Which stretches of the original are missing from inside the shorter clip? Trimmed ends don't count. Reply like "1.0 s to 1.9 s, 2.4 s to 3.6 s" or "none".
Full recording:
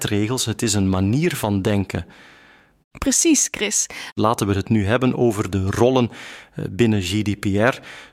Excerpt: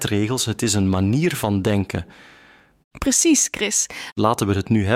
none